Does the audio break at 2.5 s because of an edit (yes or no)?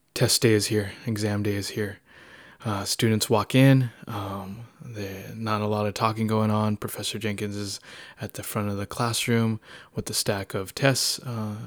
no